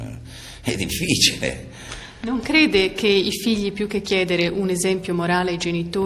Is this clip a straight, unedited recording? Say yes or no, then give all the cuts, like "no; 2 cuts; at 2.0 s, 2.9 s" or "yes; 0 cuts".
yes; 0 cuts